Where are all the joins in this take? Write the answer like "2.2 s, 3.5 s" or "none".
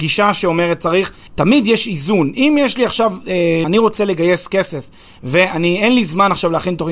1.3 s, 3.6 s